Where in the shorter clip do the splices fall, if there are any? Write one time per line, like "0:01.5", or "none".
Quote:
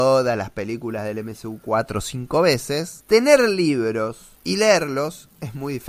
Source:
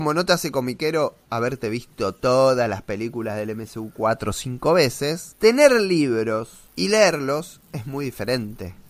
none